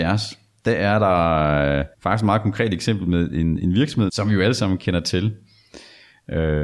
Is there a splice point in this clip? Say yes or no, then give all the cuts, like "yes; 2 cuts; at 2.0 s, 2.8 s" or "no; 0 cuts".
yes; 2 cuts; at 1.9 s, 4.1 s